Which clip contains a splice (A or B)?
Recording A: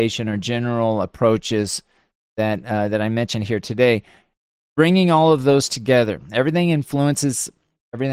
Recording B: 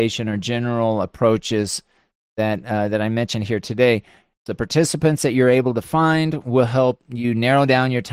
B